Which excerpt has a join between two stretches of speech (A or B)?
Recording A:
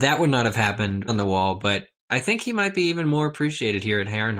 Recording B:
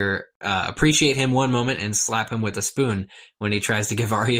A